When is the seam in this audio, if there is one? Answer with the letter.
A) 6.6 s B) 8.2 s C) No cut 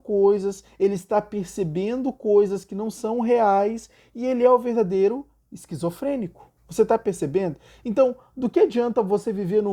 A